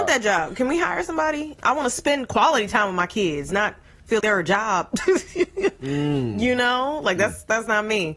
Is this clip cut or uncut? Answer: cut